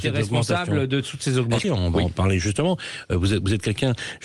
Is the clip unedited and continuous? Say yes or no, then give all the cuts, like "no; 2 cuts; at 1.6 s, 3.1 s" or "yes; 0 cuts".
no; 1 cut; at 1.6 s